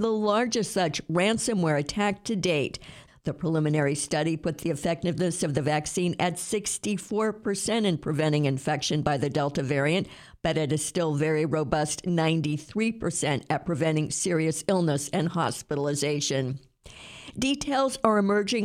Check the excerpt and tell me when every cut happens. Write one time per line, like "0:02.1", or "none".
0:03.1